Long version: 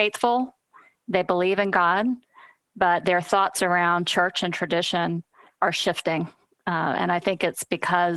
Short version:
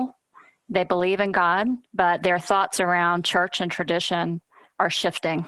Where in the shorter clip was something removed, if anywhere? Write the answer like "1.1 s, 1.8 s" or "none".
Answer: 1.9 s

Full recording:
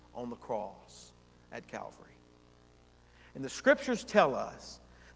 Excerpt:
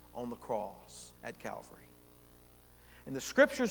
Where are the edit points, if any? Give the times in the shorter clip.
1.2 s

